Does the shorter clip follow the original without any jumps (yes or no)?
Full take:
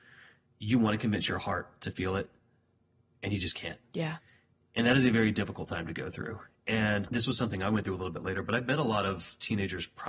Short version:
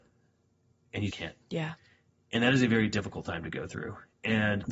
no